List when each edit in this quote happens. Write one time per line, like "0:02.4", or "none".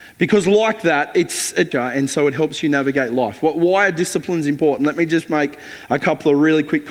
0:01.7

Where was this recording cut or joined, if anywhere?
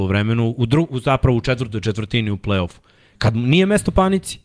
none

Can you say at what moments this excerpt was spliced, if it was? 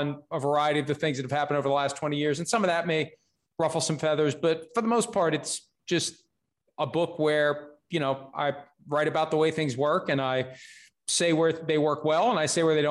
none

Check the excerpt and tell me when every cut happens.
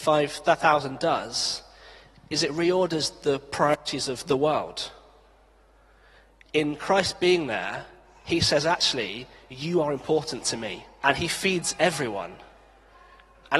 0:11.0

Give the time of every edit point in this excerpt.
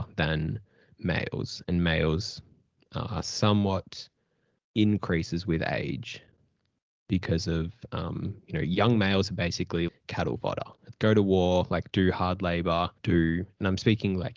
0:09.9
0:10.9
0:13.0

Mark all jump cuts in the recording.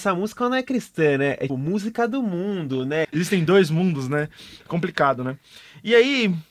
0:01.5
0:03.0

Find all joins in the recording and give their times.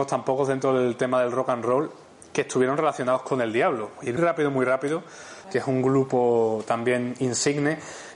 0:04.2
0:05.4

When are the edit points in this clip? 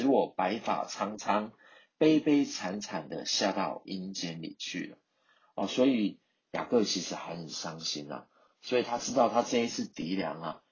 none

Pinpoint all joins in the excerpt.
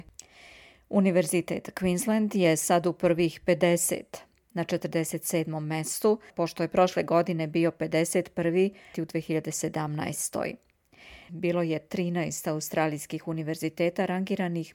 0:06.3
0:08.9
0:11.3

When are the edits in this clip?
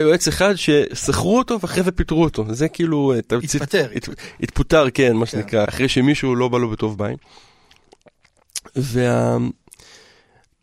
0:05.7

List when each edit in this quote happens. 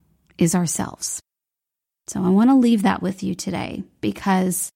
none

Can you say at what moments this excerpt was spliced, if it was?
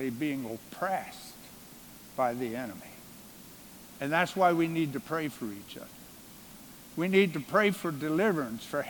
none

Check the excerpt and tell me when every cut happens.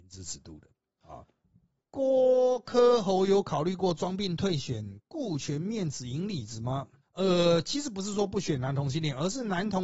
0:01.8
0:07.0

